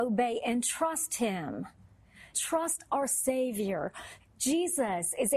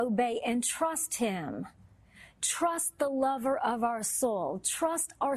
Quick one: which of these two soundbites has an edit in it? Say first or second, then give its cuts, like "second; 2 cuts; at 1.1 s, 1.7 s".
first; 2 cuts; at 2.3 s, 4.2 s